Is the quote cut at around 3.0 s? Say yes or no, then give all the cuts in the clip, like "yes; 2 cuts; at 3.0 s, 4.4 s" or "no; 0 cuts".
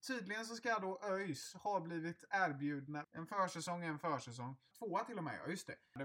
yes; 2 cuts; at 3.0 s, 4.7 s